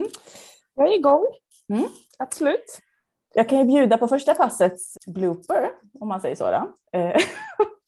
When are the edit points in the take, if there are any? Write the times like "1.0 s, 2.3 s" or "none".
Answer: 4.9 s